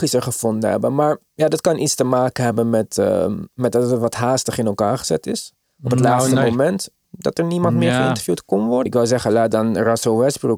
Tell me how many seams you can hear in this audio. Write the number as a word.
two